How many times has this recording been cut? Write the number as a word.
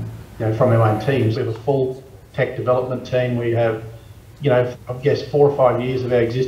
two